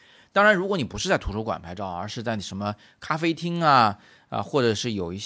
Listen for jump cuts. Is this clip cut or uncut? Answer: uncut